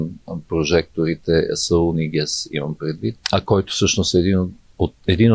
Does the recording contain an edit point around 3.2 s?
yes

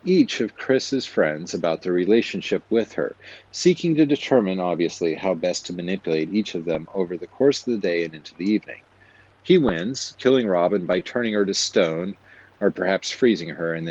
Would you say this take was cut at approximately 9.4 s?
yes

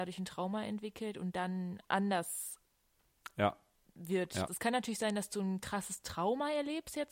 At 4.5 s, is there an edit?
yes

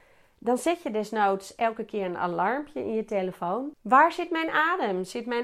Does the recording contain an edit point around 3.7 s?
yes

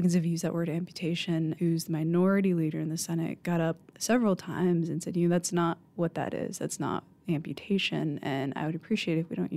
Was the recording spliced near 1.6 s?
yes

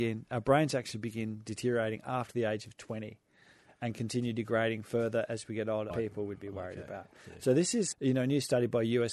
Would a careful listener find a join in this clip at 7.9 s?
yes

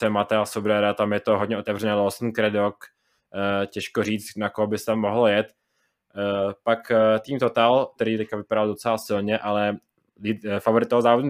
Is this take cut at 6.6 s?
no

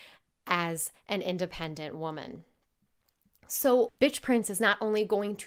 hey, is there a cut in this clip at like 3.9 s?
yes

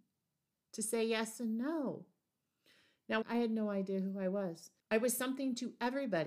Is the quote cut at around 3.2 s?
yes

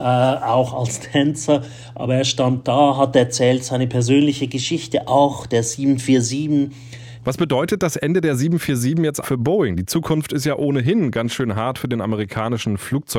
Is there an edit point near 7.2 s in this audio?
yes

